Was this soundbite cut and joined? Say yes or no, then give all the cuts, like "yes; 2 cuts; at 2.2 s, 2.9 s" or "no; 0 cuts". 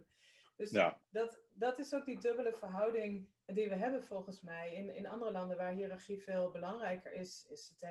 no; 0 cuts